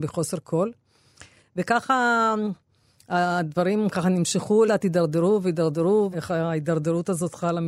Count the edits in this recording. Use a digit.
2